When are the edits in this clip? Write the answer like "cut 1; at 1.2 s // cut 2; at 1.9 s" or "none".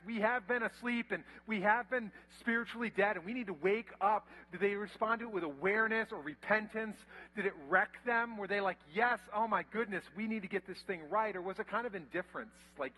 none